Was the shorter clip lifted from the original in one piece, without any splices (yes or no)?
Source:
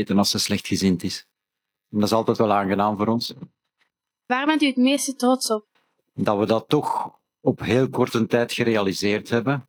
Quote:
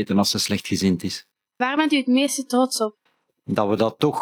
no